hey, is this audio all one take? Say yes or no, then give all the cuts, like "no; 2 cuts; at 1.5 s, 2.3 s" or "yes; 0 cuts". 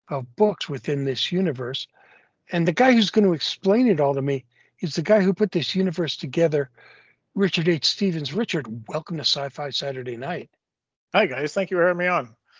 yes; 0 cuts